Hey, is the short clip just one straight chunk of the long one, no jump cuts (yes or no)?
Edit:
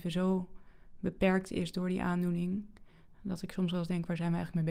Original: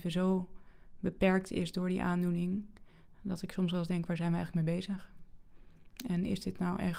yes